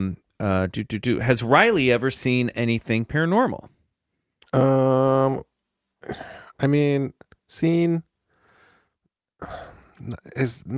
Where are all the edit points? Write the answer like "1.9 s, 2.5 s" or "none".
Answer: none